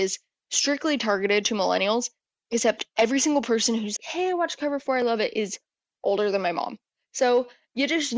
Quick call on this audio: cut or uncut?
cut